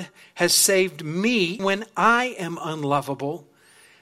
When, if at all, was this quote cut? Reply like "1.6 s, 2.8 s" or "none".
1.6 s